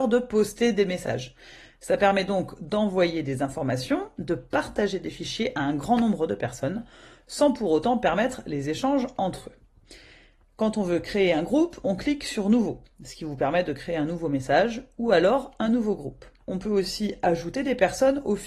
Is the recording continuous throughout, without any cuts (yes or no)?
no